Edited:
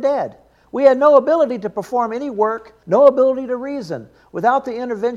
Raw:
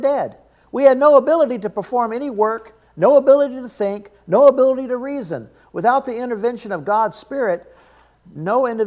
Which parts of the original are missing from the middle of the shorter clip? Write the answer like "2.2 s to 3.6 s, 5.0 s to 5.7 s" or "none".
2.8 s to 4.2 s